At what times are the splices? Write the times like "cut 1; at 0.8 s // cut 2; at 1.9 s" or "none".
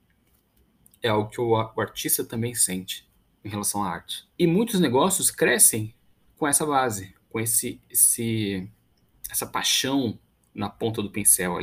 cut 1; at 4.3 s